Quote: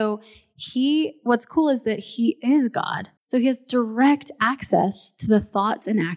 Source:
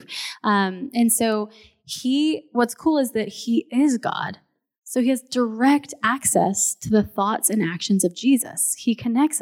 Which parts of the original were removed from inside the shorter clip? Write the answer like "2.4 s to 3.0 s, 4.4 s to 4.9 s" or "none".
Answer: 4.5 s to 4.8 s